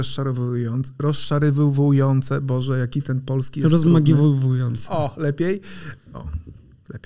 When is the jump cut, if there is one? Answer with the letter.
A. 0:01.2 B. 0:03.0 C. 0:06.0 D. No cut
C